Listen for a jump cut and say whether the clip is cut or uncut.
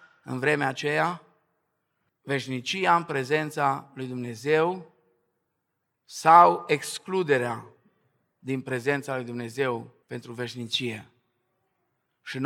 cut